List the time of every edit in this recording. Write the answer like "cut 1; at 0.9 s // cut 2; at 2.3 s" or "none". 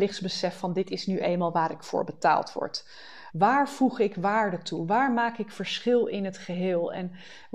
cut 1; at 3.3 s

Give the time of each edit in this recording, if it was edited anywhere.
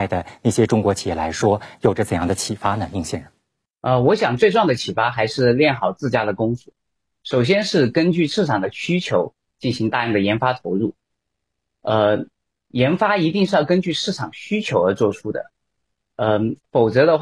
none

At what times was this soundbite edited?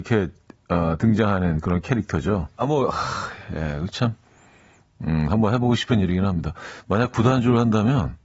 cut 1; at 2.6 s

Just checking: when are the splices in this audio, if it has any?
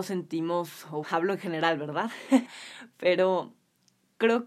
cut 1; at 1.0 s // cut 2; at 2.5 s

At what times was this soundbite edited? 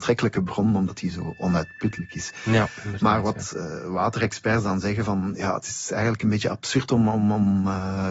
none

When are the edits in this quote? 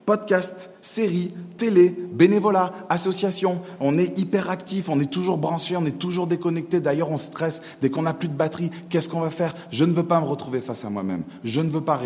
none

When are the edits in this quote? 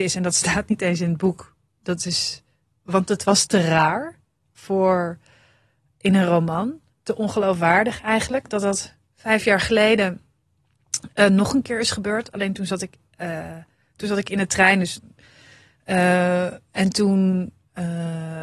none

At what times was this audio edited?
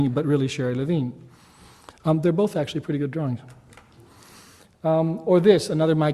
none

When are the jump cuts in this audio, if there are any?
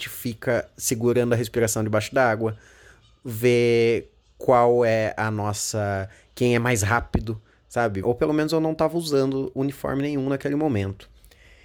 cut 1; at 8.0 s

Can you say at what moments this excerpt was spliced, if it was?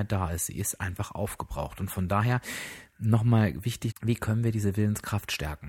cut 1; at 3.9 s

